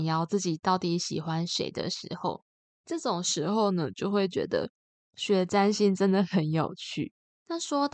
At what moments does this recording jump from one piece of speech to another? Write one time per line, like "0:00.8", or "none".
0:02.6